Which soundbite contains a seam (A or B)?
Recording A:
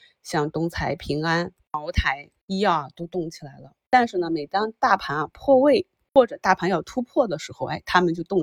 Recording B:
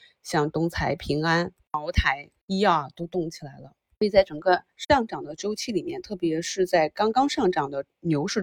A